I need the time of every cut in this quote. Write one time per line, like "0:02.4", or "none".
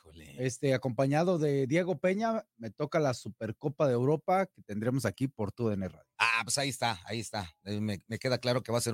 none